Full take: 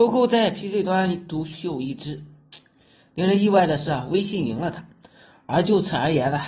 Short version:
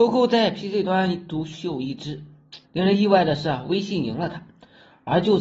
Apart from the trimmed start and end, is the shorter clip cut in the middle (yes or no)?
yes